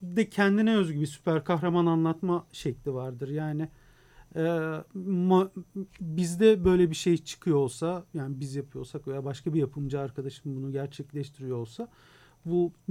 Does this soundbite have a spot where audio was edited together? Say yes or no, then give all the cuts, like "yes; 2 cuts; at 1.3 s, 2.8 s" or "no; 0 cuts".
no; 0 cuts